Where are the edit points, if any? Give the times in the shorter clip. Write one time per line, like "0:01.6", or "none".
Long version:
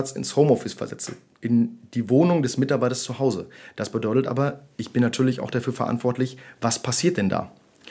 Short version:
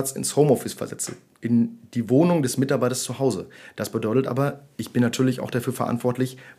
none